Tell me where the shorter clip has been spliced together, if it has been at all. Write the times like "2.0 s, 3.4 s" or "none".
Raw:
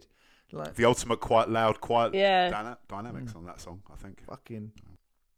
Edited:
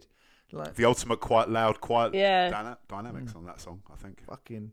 none